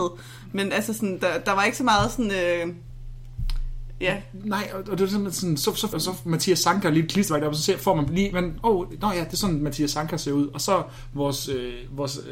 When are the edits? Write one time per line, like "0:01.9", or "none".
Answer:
0:05.9